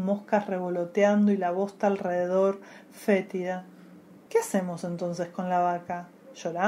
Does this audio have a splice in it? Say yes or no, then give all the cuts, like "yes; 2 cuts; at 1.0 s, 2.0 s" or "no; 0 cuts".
no; 0 cuts